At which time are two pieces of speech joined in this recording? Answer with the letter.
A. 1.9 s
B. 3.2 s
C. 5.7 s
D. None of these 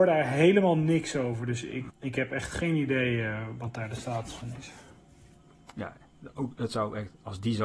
A